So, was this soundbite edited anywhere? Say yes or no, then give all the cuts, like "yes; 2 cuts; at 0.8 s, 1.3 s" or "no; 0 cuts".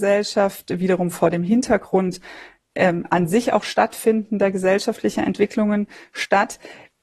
no; 0 cuts